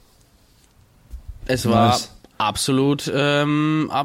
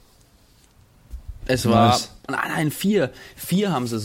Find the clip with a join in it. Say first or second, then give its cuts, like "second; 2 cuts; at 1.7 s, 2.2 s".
second; 1 cut; at 2.3 s